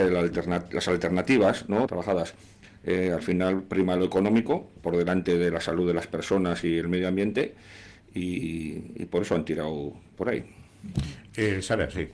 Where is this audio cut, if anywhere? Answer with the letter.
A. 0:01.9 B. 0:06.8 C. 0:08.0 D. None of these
A